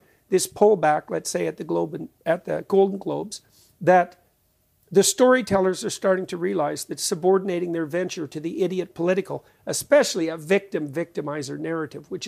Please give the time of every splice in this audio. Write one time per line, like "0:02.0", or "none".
none